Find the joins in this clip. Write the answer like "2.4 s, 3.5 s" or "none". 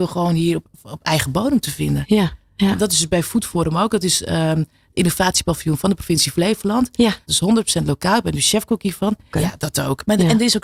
7.3 s, 9.3 s